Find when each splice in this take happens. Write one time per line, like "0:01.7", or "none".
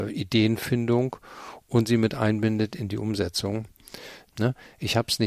0:04.3